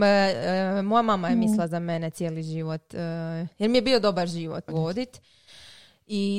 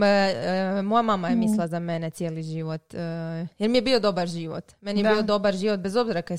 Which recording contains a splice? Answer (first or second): first